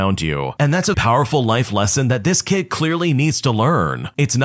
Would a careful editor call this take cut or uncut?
cut